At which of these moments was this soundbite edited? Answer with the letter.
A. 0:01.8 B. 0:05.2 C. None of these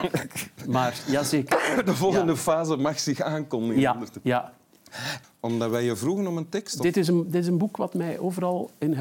B